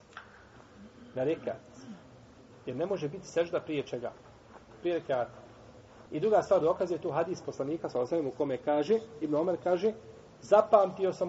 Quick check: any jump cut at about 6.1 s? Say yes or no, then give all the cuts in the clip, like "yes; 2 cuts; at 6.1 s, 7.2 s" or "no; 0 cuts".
yes; 1 cut; at 6.1 s